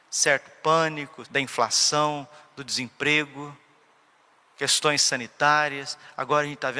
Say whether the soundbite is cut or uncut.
cut